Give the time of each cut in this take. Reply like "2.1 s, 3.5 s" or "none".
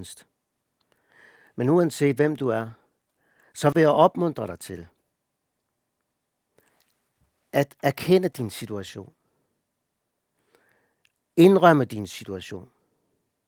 none